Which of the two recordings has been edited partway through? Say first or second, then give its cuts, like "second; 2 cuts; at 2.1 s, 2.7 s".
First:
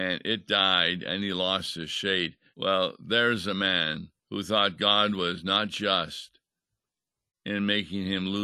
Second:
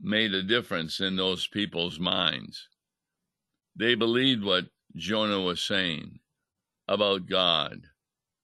first; 2 cuts; at 2.5 s, 4.2 s